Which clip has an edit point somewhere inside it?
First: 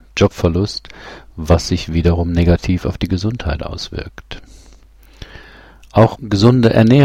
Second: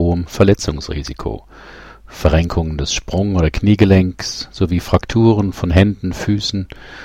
first; 1 cut; at 6.2 s

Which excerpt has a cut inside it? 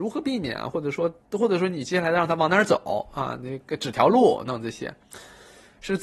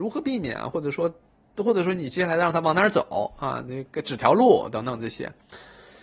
first; 2 cuts; at 1.2 s, 4.5 s

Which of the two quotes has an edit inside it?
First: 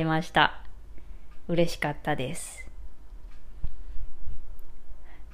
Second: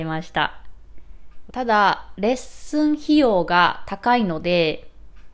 second; 1 cut; at 1.5 s

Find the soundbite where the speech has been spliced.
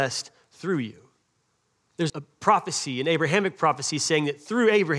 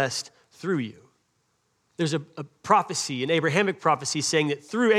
first; 1 cut; at 2.1 s

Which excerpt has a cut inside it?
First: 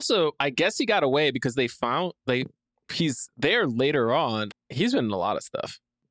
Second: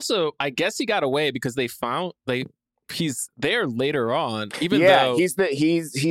first; 1 cut; at 4.5 s

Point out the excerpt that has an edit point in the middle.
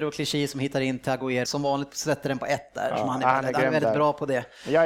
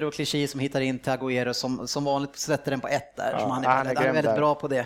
first; 1 cut; at 1.4 s

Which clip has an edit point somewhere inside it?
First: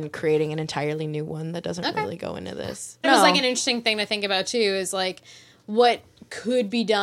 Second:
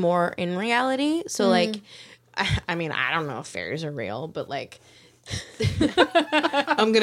first; 1 cut; at 3.0 s

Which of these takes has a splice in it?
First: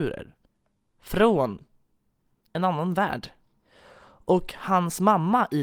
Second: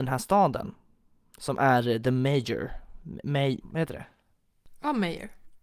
second; 1 cut; at 3.6 s

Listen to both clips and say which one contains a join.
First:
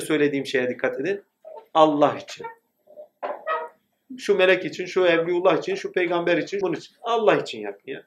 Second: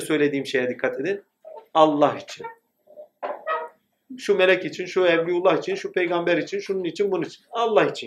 first; 1 cut; at 6.6 s

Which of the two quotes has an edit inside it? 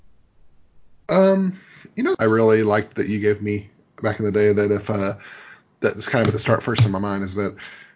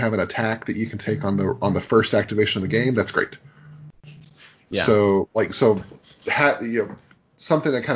first; 1 cut; at 2.1 s

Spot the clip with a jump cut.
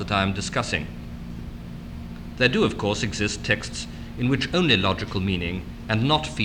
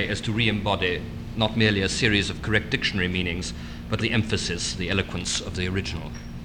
second; 1 cut; at 4.0 s

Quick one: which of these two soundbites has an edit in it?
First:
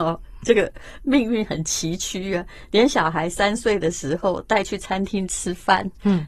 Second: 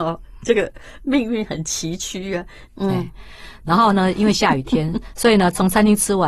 second; 1 cut; at 2.7 s

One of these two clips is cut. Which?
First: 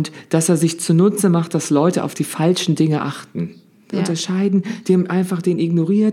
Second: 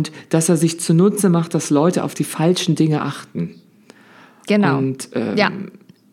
first; 1 cut; at 3.9 s

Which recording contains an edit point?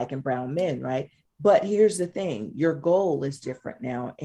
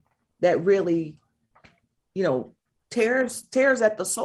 first; 1 cut; at 1.2 s

